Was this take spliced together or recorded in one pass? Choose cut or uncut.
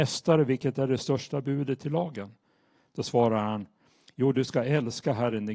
uncut